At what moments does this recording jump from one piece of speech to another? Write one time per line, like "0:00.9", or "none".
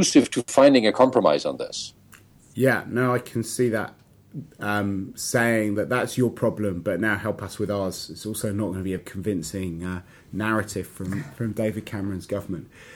0:09.0